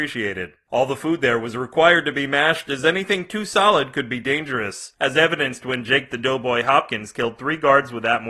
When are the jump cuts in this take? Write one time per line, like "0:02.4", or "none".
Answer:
none